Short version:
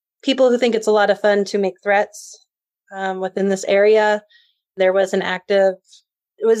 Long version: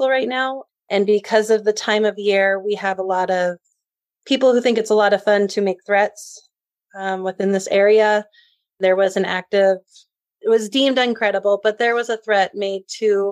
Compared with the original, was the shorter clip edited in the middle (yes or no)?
no